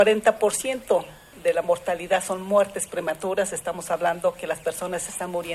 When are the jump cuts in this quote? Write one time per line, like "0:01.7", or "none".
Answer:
none